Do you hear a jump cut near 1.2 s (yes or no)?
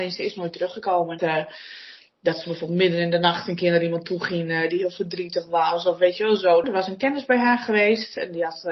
yes